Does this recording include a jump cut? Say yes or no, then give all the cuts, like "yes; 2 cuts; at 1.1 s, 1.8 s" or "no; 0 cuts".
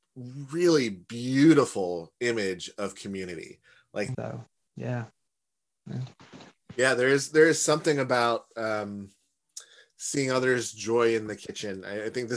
yes; 1 cut; at 4.1 s